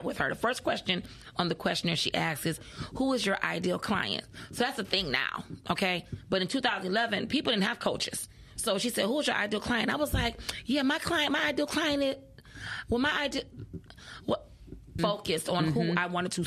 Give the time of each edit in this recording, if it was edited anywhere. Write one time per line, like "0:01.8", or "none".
0:08.6
0:15.0